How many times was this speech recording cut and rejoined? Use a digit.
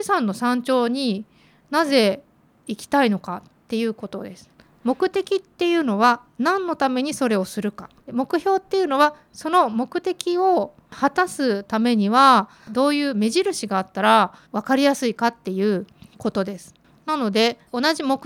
2